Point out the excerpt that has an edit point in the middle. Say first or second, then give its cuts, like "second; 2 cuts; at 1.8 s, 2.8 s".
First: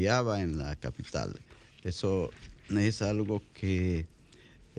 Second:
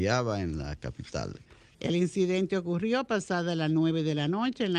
second; 1 cut; at 1.7 s